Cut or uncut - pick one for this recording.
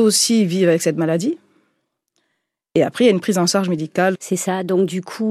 cut